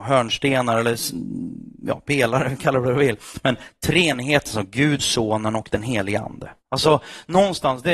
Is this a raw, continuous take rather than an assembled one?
no; 2 cuts; at 5.0 s, 6.6 s

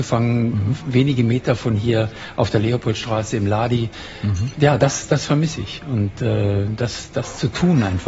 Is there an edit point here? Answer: no; 0 cuts

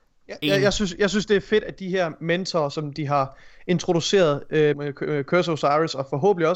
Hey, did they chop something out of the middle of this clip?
yes; 1 cut; at 4.7 s

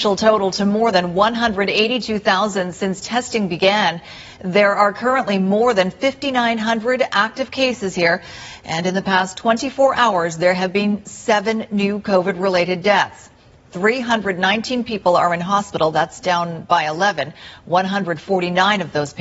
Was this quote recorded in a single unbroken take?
yes; 0 cuts

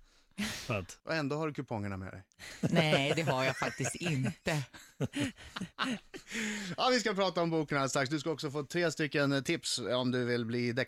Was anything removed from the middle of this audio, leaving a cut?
yes; 1 cut; at 1.0 s

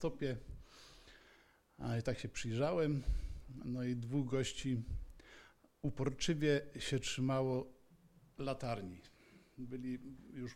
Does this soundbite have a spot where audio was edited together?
no; 0 cuts

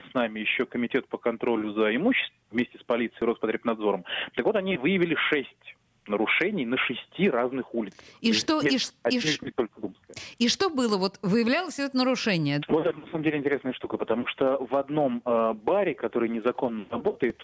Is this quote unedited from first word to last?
no; 1 cut; at 12.6 s

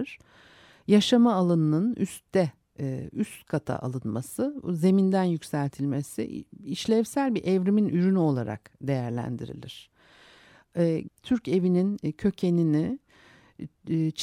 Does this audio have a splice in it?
yes; 1 cut; at 11.1 s

